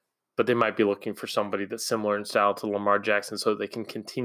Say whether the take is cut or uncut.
uncut